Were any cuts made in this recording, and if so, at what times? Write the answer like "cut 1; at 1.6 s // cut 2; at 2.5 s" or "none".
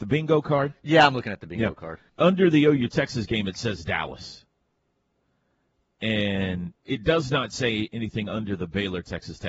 cut 1; at 2.1 s // cut 2; at 6.8 s